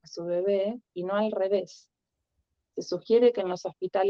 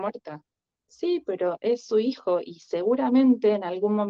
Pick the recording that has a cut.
first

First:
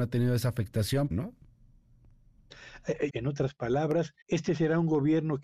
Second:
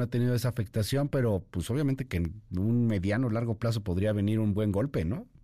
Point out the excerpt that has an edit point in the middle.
first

